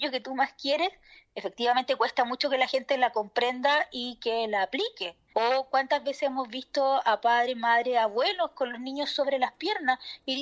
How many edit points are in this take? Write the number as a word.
one